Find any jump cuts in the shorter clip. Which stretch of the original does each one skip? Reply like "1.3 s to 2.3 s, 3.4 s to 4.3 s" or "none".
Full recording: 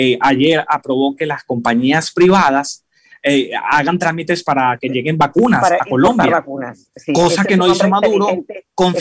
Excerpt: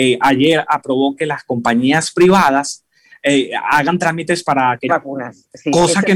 4.9 s to 6.3 s